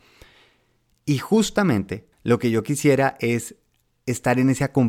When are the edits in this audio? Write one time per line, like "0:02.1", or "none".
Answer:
0:02.1